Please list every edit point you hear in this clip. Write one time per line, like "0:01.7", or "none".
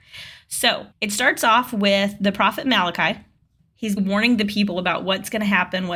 0:00.9
0:04.0